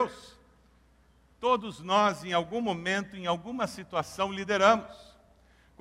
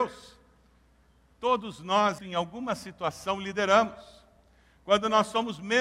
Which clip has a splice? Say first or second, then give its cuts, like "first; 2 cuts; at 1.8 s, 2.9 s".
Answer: second; 1 cut; at 2.2 s